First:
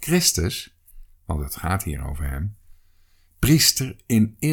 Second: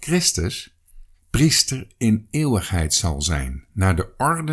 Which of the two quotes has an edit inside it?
second; 1 cut; at 1.1 s

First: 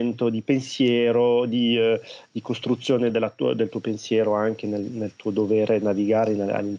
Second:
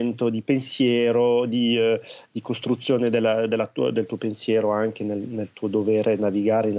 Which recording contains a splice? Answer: first; 1 cut; at 3.1 s

